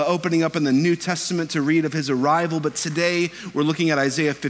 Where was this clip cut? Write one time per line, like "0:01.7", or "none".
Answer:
none